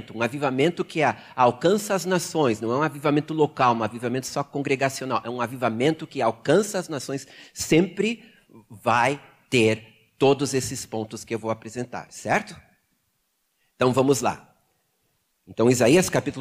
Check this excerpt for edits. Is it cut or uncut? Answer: uncut